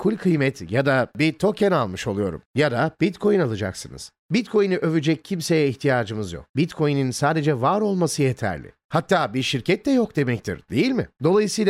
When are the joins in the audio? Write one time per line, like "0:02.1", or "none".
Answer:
0:08.8